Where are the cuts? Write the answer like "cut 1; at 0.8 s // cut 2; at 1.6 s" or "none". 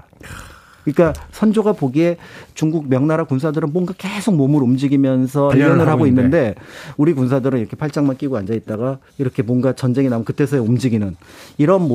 cut 1; at 5.5 s // cut 2; at 9.1 s